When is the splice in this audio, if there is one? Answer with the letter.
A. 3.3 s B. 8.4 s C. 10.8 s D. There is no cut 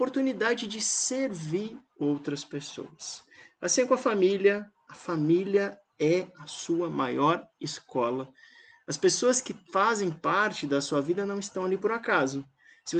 D